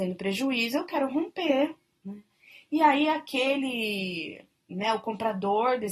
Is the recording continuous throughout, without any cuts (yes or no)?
yes